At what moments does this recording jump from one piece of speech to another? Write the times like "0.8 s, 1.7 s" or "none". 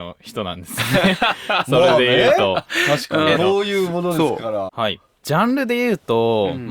3.4 s, 4.7 s